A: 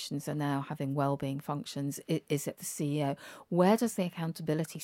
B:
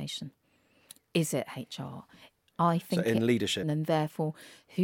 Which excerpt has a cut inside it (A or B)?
B